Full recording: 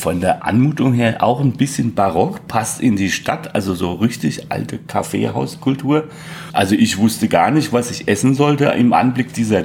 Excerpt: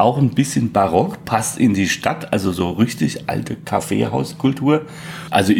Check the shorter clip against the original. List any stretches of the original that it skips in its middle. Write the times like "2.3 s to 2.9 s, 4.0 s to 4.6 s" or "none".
none